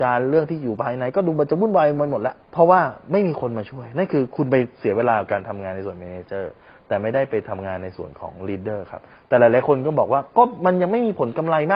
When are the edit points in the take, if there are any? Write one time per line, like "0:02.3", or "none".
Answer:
0:02.4